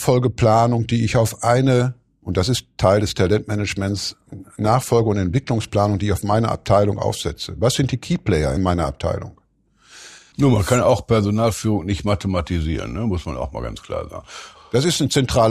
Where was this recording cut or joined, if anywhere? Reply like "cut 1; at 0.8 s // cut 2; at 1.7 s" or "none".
cut 1; at 10.3 s // cut 2; at 14.6 s